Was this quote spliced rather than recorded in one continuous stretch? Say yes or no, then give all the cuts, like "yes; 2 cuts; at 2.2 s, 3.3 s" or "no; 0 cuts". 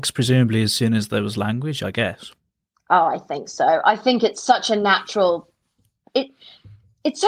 no; 0 cuts